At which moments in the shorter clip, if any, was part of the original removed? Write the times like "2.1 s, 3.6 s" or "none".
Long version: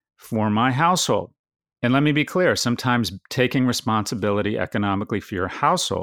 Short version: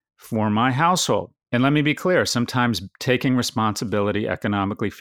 1.4 s